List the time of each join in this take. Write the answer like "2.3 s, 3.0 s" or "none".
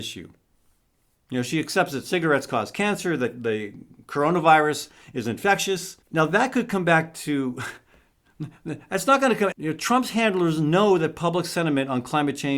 6.0 s, 9.5 s